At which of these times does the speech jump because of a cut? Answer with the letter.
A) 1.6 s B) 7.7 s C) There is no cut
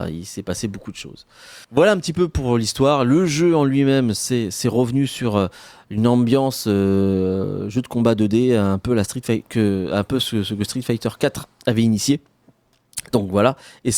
A